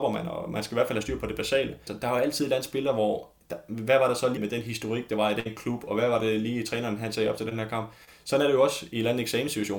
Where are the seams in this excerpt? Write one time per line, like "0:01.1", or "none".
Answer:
0:01.9
0:04.4